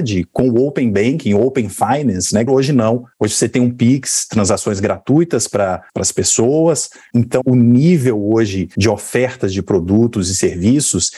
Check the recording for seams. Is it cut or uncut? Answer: cut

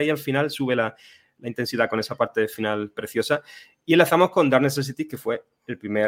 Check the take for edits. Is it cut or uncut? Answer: uncut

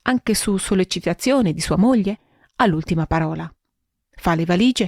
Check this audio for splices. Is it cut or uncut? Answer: uncut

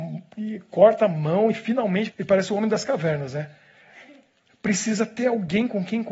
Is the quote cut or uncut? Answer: cut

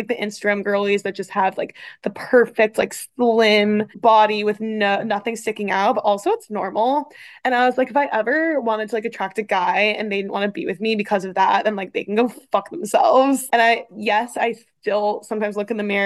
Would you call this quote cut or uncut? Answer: cut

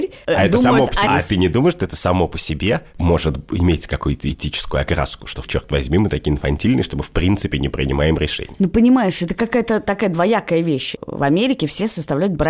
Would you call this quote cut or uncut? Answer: cut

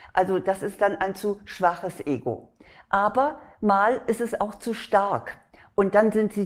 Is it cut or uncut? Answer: uncut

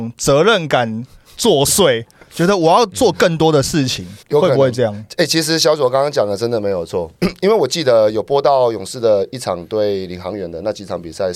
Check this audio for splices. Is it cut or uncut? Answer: cut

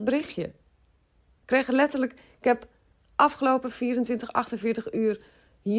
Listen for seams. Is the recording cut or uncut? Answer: uncut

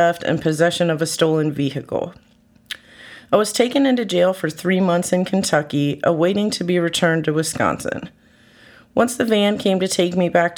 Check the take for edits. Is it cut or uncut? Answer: uncut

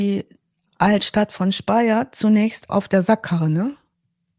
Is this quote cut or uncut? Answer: cut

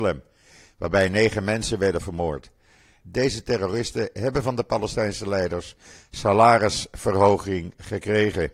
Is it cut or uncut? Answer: cut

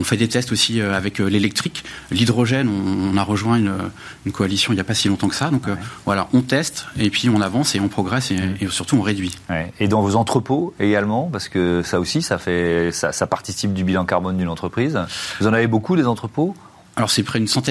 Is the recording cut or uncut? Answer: uncut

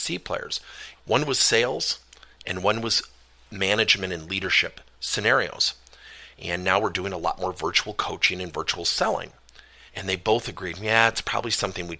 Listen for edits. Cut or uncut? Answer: cut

